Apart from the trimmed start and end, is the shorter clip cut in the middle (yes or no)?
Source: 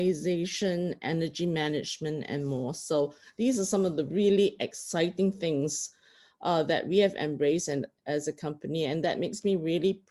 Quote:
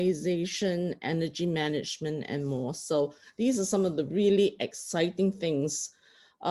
no